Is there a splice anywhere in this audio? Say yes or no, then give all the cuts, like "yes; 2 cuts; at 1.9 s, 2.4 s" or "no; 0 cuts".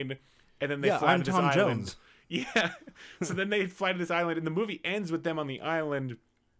no; 0 cuts